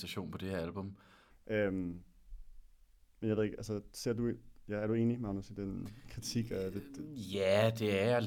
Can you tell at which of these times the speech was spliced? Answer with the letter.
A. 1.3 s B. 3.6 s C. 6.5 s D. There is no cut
A